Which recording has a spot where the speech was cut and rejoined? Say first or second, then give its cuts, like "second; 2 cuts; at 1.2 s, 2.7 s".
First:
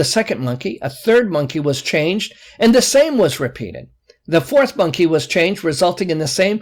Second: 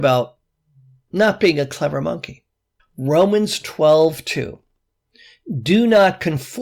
second; 1 cut; at 2.8 s